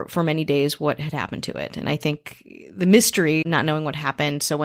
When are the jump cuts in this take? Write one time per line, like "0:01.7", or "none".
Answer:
0:03.4